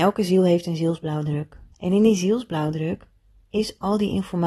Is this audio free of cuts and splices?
no; 1 cut; at 1.7 s

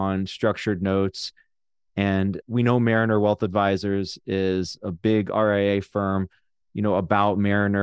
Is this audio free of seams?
no; 2 cuts; at 2.4 s, 6.6 s

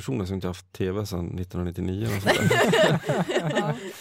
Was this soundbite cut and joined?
no; 0 cuts

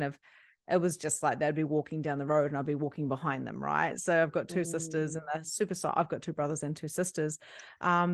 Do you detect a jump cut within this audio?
no; 0 cuts

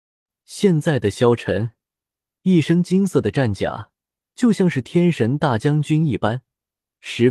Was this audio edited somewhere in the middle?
yes; 1 cut; at 4.3 s

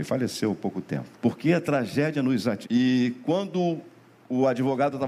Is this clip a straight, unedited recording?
no; 2 cuts; at 1.1 s, 2.6 s

